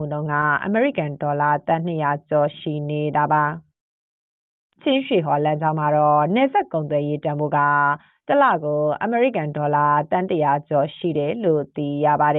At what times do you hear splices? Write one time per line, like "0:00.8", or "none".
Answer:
none